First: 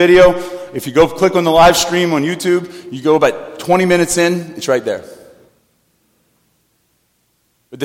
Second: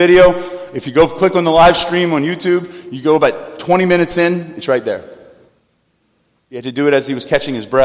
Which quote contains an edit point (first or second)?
second